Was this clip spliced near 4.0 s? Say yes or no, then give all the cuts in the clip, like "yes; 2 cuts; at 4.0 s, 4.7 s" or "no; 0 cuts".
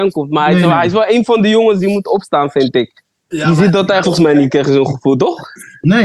yes; 1 cut; at 4.0 s